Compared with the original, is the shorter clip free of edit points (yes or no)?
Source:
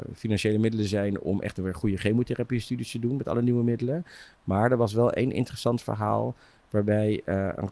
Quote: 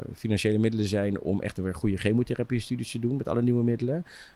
yes